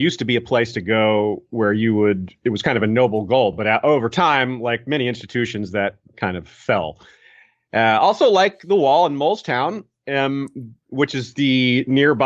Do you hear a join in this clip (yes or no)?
no